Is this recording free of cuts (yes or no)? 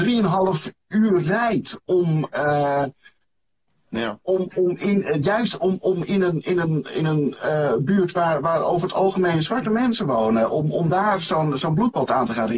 yes